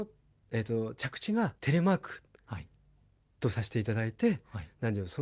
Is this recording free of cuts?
no; 1 cut; at 1.6 s

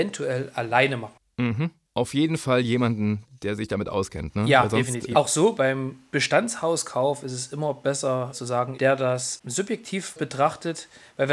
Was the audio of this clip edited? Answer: yes; 2 cuts; at 5.1 s, 8.7 s

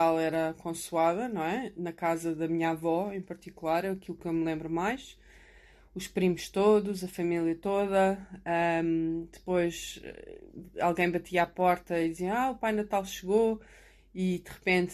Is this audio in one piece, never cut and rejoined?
yes; 0 cuts

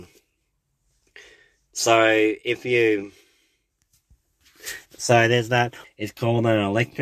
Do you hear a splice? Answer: yes; 1 cut; at 5.8 s

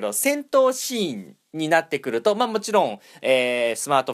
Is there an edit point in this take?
no; 0 cuts

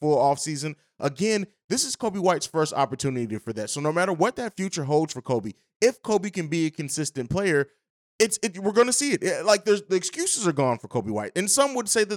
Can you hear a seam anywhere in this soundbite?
no; 0 cuts

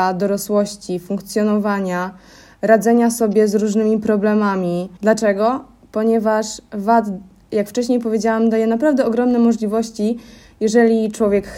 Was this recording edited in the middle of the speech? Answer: yes; 1 cut; at 5.0 s

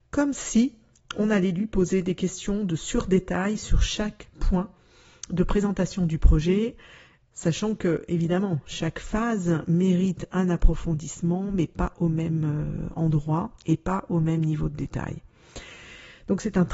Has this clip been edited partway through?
no; 0 cuts

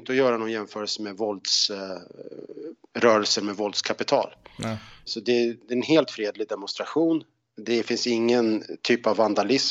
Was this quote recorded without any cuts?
no; 1 cut; at 5.1 s

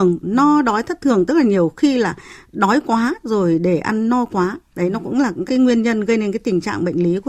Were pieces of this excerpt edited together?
yes; 1 cut; at 5.5 s

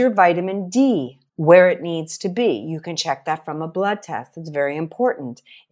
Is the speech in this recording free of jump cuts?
no; 1 cut; at 1.3 s

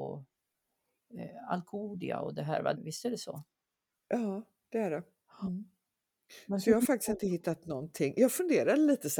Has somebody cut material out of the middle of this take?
yes; 1 cut; at 2.7 s

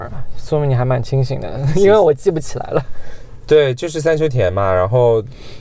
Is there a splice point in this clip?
no; 0 cuts

